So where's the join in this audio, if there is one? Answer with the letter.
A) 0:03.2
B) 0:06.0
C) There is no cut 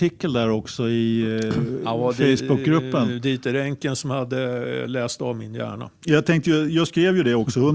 B